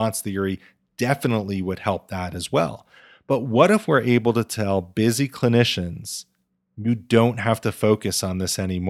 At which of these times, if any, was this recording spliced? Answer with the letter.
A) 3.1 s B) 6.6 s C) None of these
C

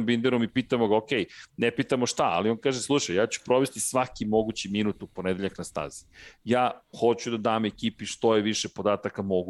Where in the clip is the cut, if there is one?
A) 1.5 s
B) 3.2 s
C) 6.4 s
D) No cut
D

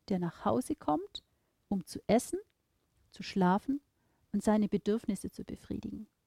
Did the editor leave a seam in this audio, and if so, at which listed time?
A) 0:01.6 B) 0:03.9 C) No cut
C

